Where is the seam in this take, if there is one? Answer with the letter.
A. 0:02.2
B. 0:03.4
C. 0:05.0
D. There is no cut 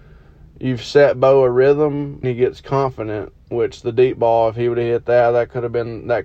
A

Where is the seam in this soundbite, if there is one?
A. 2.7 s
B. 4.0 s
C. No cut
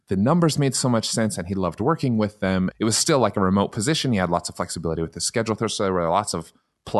A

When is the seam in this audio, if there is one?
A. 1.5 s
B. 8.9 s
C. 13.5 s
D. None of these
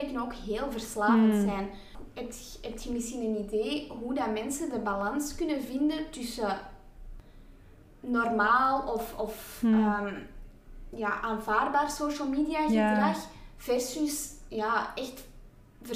D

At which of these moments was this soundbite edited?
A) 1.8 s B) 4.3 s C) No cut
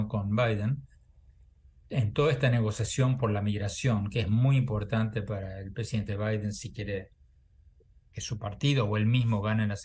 C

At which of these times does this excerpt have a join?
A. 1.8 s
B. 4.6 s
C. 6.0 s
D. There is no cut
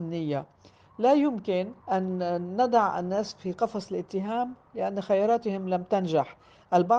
A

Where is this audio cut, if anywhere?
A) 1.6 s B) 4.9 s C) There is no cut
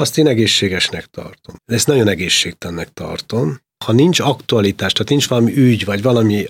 A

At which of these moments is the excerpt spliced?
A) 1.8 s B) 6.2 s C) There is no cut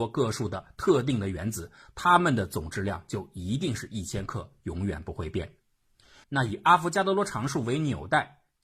B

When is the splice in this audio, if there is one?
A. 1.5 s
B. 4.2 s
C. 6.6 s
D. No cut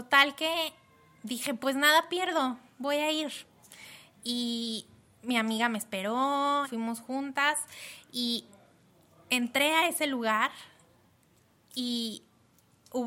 C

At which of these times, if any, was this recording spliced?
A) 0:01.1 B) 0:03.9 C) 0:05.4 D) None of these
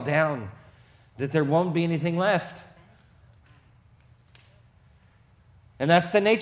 D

